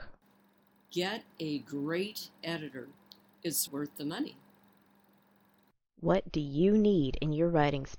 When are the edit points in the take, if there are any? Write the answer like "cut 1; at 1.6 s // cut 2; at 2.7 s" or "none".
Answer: cut 1; at 3.7 s